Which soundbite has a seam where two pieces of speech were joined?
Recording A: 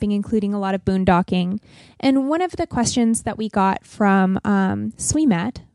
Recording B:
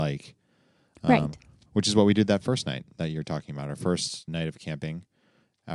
B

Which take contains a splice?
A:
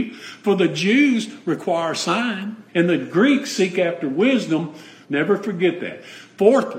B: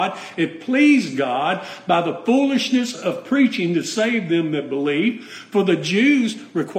A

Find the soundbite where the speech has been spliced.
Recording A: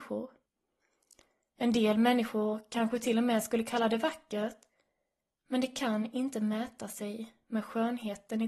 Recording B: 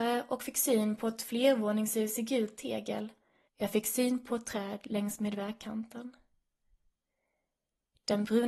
B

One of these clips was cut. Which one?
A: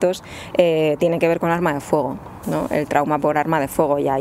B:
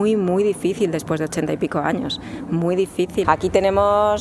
B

